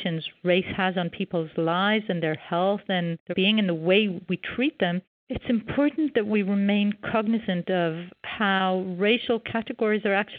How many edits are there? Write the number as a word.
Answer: one